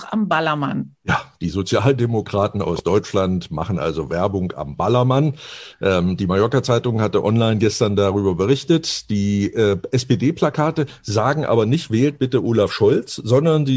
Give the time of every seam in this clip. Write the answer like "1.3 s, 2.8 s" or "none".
none